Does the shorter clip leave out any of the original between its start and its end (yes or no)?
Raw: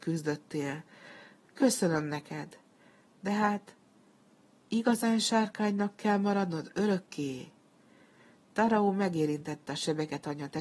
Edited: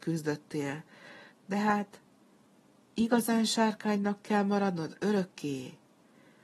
yes